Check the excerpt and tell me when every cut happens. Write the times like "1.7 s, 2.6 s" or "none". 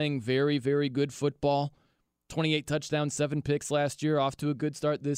none